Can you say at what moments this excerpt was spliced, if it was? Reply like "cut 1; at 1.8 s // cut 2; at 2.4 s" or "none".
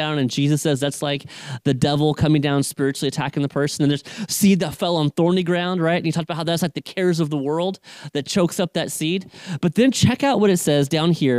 none